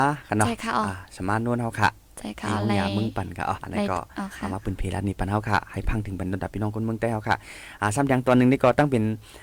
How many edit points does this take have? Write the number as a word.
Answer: one